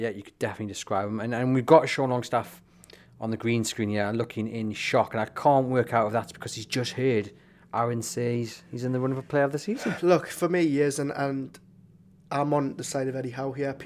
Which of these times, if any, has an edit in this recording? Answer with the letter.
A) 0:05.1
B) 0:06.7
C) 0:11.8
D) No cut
D